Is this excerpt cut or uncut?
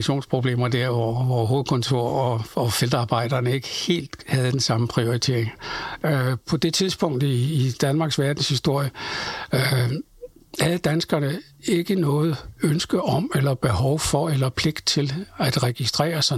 uncut